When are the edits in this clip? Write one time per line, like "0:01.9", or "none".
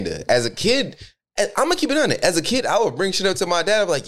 none